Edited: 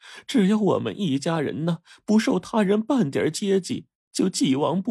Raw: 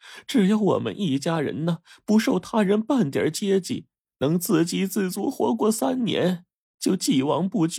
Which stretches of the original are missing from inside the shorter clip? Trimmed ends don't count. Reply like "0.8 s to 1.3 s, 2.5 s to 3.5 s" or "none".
3.9 s to 6.6 s